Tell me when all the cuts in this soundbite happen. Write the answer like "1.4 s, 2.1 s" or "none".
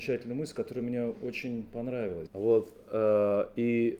2.3 s